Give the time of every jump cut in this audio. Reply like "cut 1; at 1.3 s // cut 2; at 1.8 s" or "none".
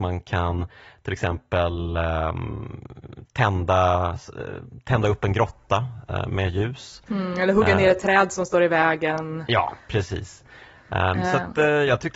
none